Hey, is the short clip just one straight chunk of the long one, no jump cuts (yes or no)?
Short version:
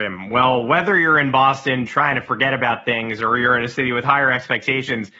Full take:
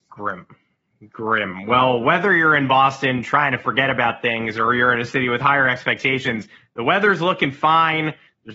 yes